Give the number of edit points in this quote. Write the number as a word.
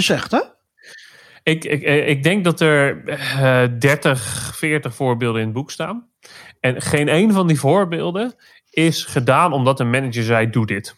zero